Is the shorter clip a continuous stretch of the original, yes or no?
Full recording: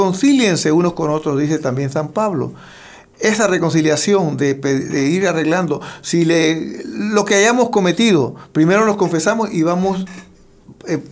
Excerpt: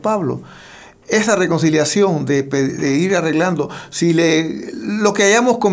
yes